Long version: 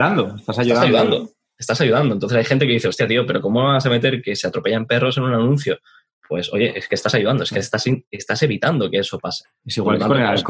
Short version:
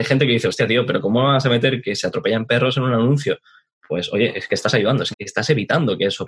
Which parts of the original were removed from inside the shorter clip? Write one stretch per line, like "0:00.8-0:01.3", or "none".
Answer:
0:07.5-0:08.1